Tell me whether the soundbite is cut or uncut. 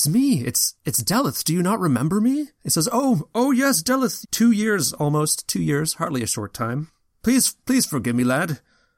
cut